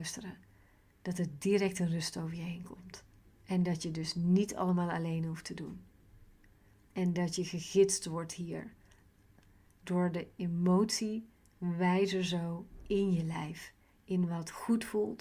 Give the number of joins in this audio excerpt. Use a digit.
1